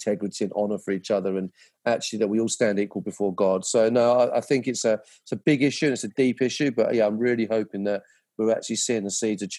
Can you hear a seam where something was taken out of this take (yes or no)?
no